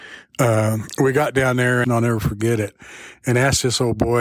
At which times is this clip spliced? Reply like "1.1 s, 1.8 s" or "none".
1.8 s